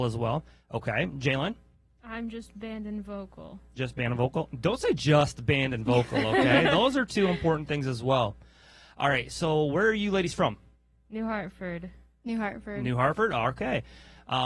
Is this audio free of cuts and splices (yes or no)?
yes